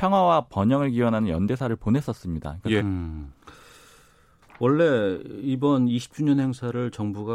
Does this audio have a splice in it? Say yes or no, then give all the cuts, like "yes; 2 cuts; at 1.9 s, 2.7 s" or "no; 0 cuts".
yes; 1 cut; at 2.8 s